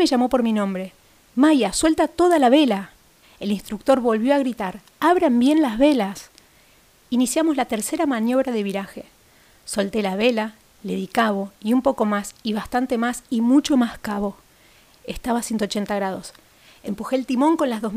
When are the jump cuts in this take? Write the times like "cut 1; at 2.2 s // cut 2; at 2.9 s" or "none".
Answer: cut 1; at 3.2 s // cut 2; at 14.9 s